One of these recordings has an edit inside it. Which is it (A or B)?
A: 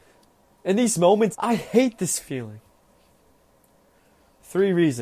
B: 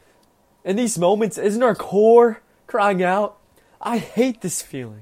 A